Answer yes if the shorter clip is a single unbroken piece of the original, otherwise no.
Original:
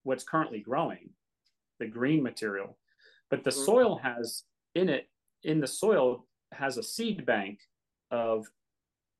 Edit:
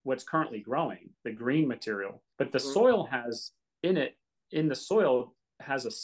no